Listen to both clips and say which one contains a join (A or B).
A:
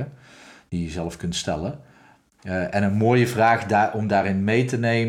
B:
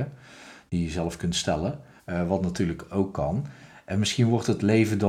B